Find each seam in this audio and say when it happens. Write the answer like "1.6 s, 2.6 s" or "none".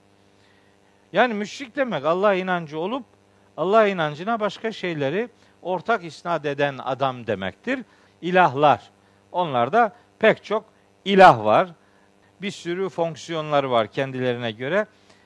1.0 s, 8.1 s, 12.2 s